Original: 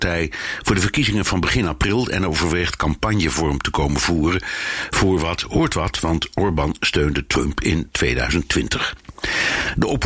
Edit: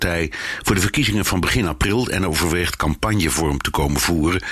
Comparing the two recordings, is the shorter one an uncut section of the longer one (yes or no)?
yes